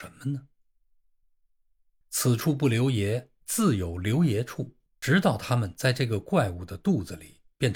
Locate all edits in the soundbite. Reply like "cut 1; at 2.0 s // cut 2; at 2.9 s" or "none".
cut 1; at 2.0 s // cut 2; at 5.0 s